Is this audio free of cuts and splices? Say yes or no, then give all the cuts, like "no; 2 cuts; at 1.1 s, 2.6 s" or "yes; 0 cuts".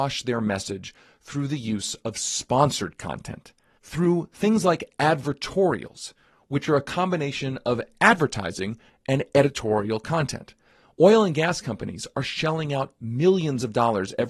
yes; 0 cuts